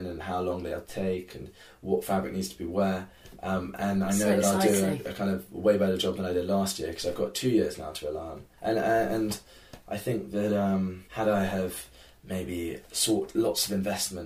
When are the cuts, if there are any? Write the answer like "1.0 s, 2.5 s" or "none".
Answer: none